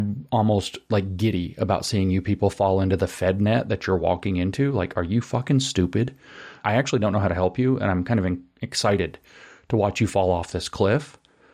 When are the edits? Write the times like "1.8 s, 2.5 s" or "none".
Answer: 6.6 s